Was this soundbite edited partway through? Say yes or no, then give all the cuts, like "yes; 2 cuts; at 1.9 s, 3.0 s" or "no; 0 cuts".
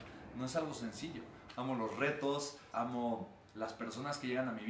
yes; 2 cuts; at 1.5 s, 2.7 s